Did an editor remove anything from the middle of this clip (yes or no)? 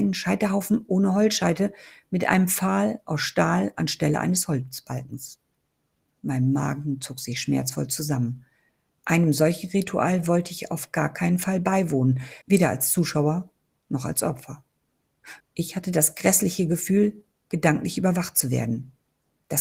yes